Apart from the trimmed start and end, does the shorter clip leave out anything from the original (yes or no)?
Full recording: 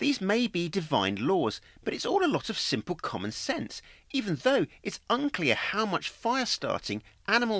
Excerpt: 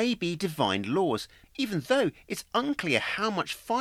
yes